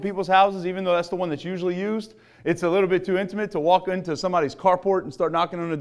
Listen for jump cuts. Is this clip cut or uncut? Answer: uncut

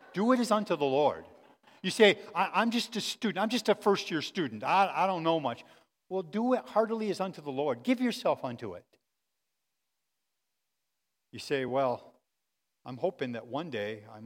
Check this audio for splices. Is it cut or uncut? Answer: uncut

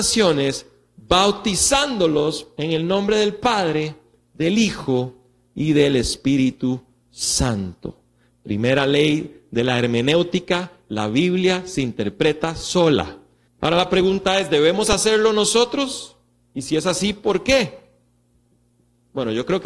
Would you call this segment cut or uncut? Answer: cut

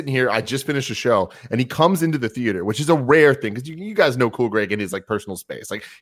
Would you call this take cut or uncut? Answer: uncut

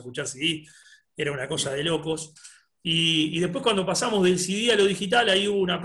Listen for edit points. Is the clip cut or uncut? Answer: uncut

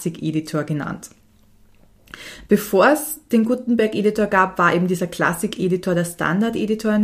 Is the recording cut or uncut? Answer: uncut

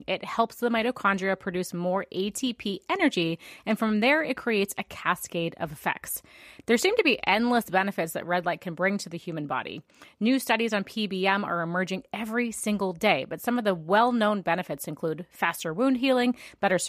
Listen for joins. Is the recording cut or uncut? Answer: uncut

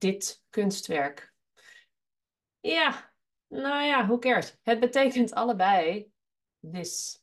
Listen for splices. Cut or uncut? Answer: uncut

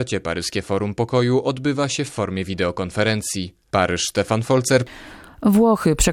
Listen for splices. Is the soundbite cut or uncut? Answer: uncut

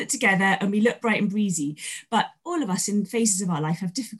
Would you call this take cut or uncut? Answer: cut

